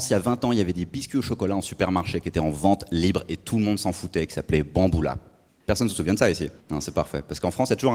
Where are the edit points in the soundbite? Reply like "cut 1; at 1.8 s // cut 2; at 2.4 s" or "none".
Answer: cut 1; at 6.6 s